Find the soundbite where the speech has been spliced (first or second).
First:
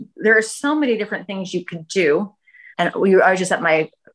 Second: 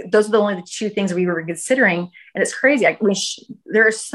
first